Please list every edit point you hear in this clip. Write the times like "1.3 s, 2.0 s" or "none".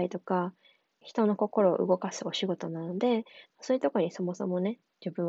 1.0 s